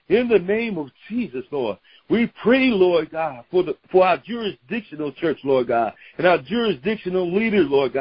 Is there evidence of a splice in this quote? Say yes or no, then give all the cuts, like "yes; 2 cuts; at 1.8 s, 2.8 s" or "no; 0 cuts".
yes; 1 cut; at 3.8 s